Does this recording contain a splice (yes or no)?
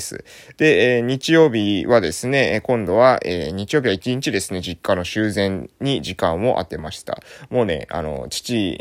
no